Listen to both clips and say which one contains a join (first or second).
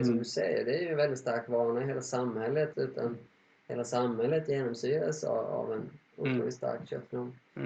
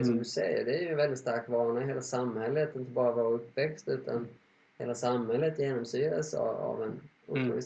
first